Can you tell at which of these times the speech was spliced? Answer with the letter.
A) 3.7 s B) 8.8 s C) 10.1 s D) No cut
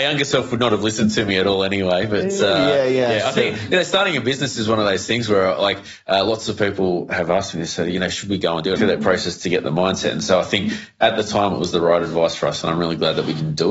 B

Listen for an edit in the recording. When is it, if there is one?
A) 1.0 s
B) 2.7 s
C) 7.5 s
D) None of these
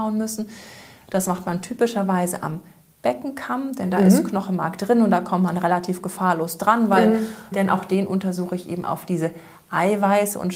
C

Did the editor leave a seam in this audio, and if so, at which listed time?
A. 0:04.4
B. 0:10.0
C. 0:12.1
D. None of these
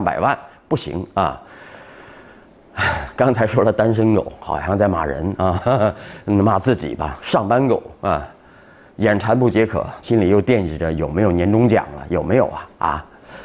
B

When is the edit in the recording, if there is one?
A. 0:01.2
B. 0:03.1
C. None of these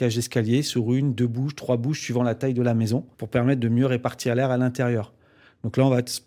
B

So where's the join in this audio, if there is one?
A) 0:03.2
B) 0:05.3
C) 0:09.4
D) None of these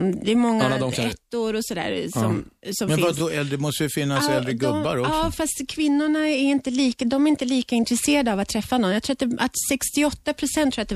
D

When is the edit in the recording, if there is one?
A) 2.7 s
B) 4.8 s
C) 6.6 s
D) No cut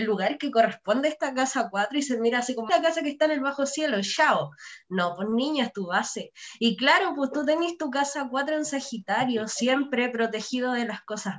A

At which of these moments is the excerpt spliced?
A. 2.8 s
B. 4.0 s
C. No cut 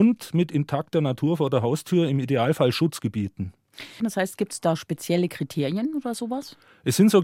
B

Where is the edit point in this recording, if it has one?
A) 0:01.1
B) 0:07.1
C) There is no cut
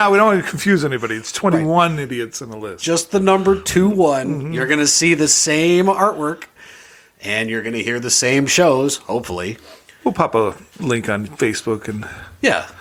C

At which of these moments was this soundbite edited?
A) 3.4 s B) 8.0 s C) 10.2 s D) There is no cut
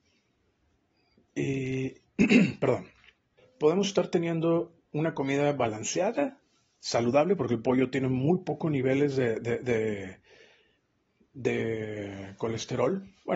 A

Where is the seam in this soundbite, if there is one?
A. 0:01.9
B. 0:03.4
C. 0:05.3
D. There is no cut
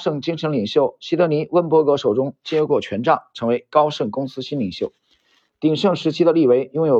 D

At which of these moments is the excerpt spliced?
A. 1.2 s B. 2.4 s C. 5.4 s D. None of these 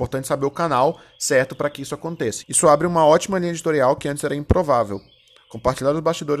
B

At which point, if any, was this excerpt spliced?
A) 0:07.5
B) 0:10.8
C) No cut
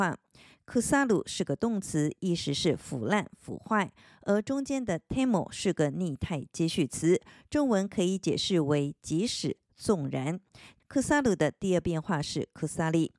B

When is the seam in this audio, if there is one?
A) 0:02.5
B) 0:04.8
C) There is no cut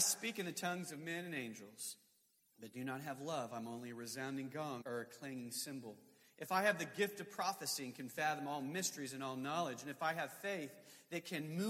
B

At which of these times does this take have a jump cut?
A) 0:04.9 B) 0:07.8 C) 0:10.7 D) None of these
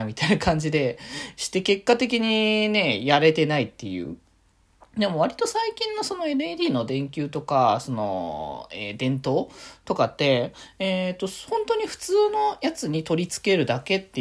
D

